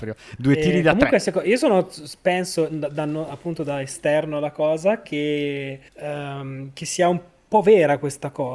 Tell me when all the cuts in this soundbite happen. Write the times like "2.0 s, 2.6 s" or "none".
5.9 s

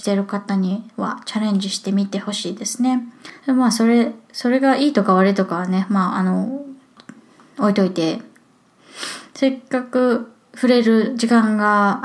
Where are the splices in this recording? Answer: 3.4 s

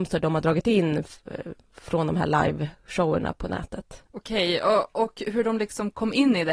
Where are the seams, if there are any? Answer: 4.1 s

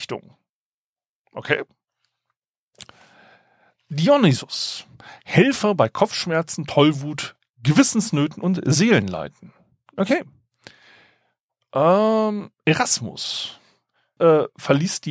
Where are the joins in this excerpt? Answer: 14.2 s

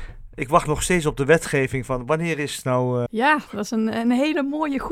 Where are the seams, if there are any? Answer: 3.1 s

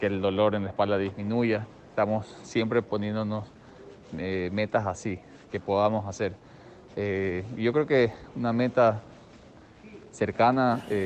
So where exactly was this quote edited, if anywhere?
none

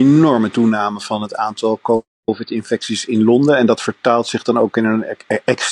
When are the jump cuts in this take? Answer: none

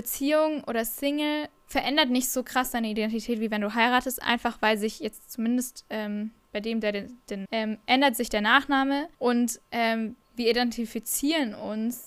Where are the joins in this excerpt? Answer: 7.4 s, 9.1 s

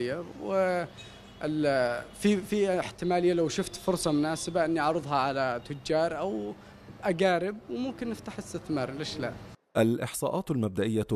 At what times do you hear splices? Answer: none

